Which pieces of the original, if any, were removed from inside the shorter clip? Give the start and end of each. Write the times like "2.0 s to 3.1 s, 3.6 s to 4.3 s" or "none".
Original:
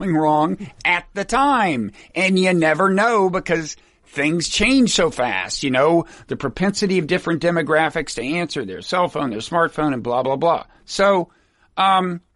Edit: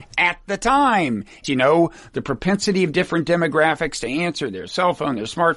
2.1 s to 5.6 s